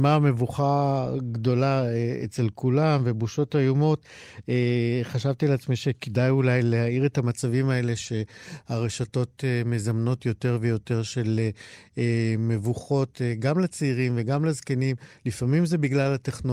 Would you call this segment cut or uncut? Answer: uncut